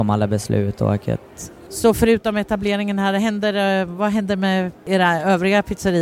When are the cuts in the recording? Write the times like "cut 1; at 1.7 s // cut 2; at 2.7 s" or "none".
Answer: cut 1; at 1.7 s